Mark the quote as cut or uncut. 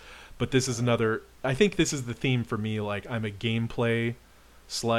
uncut